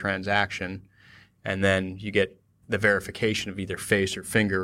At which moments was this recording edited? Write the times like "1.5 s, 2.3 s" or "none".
none